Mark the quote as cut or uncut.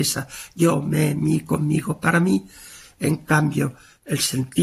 uncut